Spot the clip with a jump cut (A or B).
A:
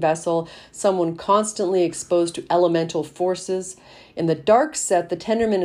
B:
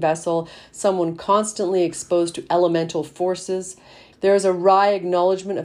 B